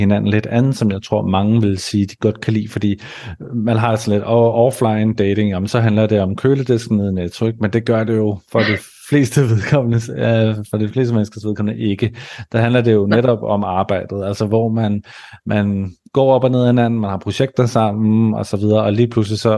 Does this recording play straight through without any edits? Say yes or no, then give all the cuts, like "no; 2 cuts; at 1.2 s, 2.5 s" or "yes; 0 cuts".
yes; 0 cuts